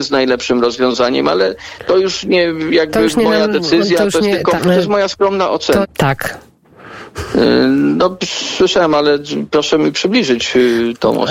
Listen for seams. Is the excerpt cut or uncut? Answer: cut